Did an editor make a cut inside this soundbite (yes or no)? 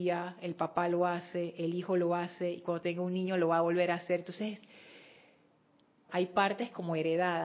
yes